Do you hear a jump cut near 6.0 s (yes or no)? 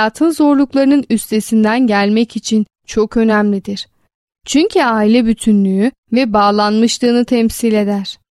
yes